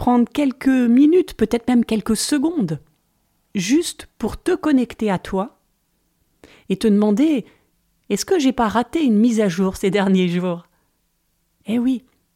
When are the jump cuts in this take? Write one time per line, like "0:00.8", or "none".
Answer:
none